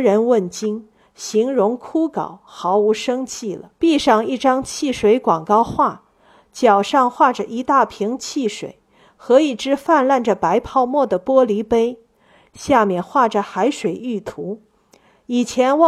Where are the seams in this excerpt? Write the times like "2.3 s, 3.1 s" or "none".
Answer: 3.8 s